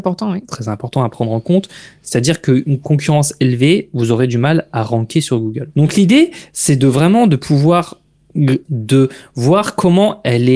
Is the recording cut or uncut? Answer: cut